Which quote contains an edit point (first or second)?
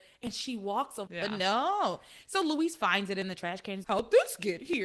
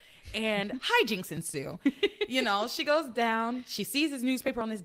first